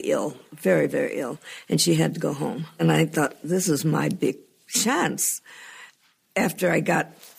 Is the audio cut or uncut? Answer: uncut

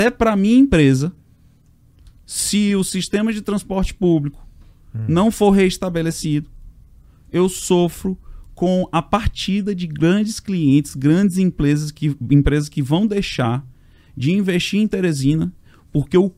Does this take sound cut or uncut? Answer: uncut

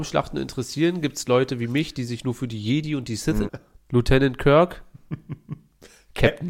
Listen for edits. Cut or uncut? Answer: cut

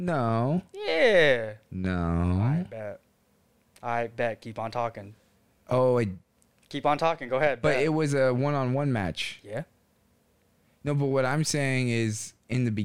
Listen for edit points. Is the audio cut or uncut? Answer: uncut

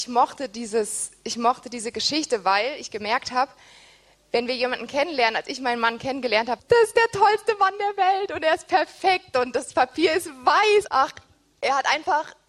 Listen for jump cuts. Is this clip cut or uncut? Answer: cut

